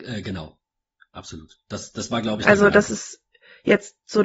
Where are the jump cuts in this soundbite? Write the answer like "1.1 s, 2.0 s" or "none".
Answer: none